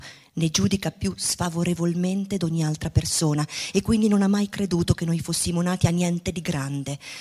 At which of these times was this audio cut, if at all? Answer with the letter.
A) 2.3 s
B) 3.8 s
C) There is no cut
C